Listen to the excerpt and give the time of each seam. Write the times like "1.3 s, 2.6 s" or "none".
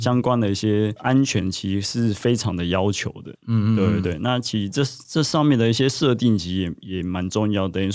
3.3 s